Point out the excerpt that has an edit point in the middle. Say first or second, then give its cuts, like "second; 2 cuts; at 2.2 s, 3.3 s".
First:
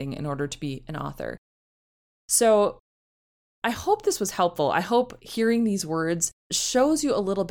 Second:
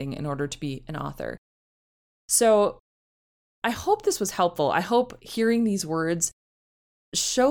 first; 1 cut; at 6.4 s